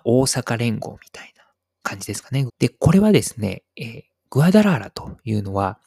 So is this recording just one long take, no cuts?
no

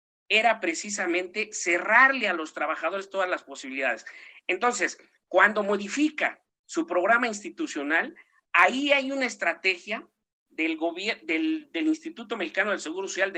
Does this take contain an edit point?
no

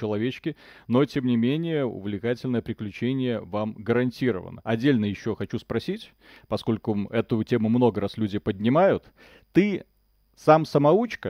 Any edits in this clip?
no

